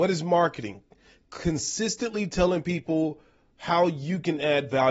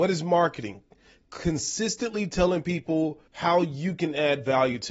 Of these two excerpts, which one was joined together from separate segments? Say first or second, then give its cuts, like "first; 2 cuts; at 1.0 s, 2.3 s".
second; 1 cut; at 3.3 s